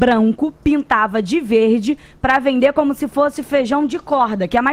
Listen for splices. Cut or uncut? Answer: uncut